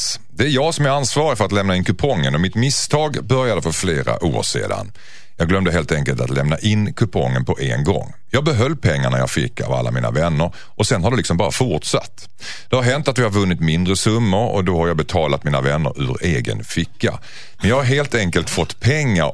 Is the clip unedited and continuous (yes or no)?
yes